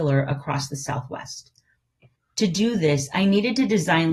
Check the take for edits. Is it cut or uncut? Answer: cut